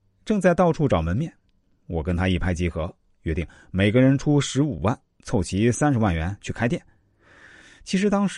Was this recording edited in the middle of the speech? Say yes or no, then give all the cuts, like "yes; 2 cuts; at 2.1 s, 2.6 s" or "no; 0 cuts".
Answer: no; 0 cuts